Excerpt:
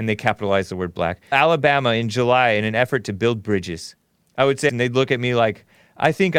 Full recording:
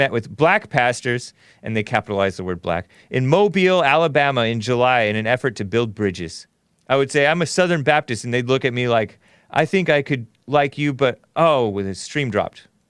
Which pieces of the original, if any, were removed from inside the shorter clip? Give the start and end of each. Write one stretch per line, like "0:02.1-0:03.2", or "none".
0:03.0-0:03.8
0:07.2-0:08.2